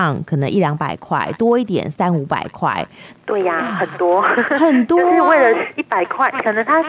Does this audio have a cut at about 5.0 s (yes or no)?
no